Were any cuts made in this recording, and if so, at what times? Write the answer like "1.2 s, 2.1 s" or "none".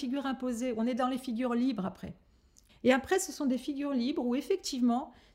2.7 s